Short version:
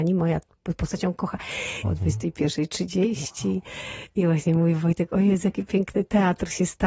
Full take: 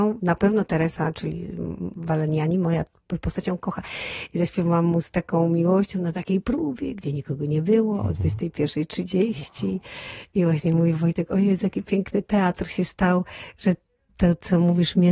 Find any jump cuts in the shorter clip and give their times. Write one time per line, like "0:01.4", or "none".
0:01.8